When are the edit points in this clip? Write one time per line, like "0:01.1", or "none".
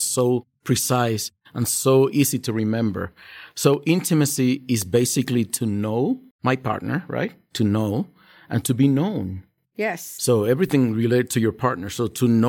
0:06.3